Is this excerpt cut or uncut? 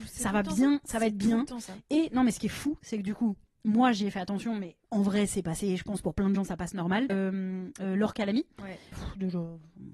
cut